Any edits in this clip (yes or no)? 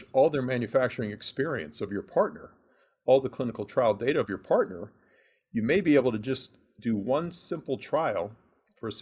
no